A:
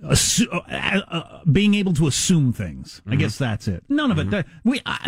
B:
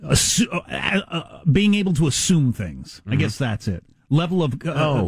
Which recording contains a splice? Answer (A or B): A